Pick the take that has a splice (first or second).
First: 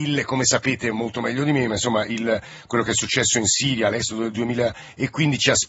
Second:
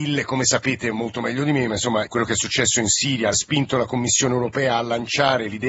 second